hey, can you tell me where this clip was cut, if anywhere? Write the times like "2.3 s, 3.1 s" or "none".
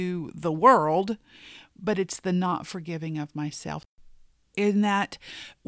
4.4 s